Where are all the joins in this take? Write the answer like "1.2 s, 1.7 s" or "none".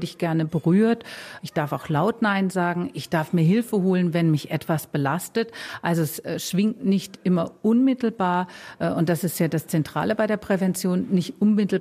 1.4 s

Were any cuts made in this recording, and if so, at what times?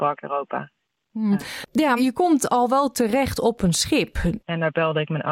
2.0 s, 4.4 s

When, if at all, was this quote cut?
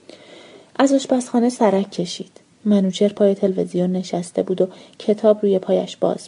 none

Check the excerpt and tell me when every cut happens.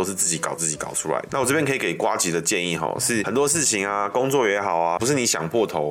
1.3 s, 5.0 s

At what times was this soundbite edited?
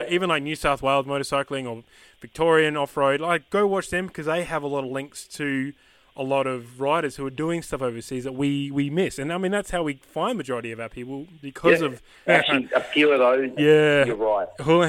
12.3 s, 13.6 s

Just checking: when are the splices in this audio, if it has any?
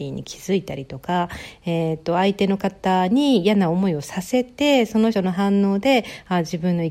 5.1 s

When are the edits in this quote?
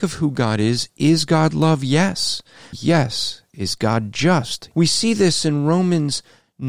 2.7 s, 4.7 s

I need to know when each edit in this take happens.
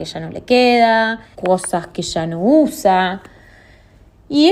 1.3 s

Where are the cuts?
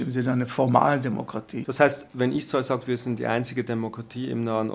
1.6 s

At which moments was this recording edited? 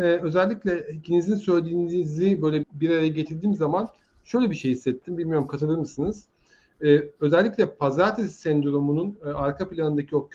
2.6 s

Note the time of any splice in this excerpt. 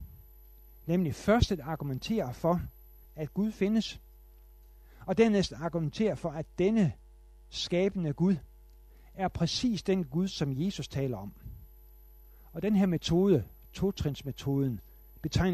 3.0 s

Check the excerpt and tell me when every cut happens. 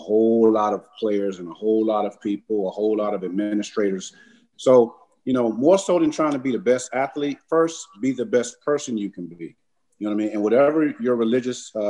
none

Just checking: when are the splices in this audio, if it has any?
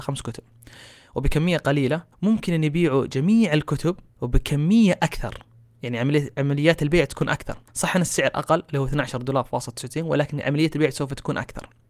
2.1 s, 4.1 s, 7.7 s

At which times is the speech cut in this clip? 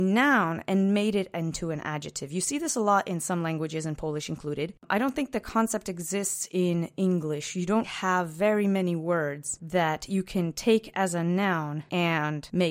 7.8 s

